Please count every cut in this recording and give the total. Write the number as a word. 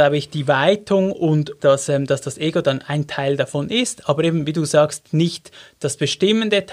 zero